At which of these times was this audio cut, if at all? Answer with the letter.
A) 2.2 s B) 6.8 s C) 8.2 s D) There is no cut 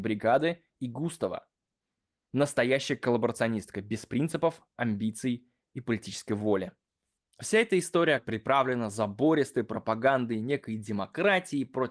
C